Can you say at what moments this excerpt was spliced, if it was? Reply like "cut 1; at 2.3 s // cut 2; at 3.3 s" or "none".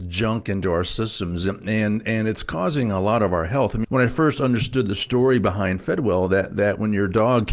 cut 1; at 3.8 s